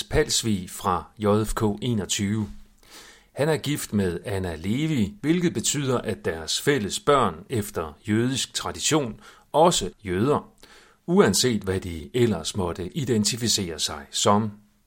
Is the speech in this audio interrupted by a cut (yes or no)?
yes